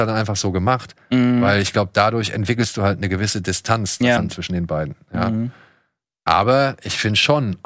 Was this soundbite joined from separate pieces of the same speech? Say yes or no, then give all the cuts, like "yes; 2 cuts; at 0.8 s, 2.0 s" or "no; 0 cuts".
yes; 1 cut; at 4.2 s